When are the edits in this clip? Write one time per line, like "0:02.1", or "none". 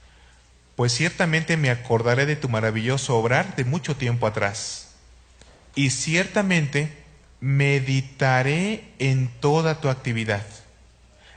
0:05.7